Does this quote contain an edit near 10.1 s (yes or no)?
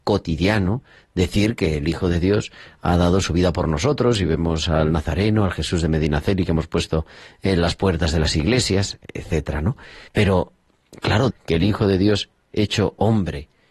yes